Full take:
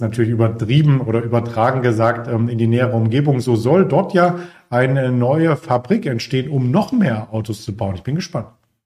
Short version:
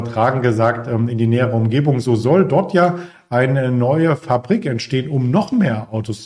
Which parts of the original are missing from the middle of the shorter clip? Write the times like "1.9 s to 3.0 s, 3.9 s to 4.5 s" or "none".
none